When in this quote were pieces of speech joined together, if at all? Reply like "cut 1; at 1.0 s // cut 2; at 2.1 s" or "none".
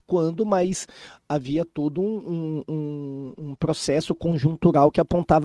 none